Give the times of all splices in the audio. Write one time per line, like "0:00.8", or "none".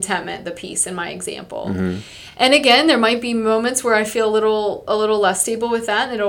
none